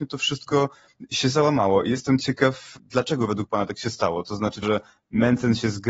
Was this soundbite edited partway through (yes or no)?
yes